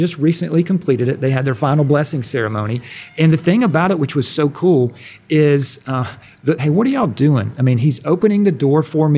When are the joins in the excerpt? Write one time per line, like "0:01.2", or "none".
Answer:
0:06.6